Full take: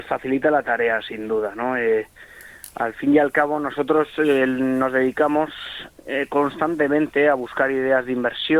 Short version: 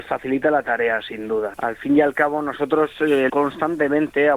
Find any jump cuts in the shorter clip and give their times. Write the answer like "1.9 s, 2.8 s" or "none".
1.5 s, 3.3 s